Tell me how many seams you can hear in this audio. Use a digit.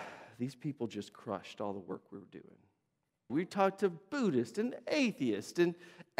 1